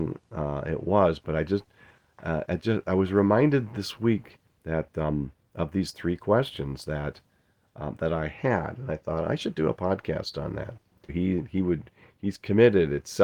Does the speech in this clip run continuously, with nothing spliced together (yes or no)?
no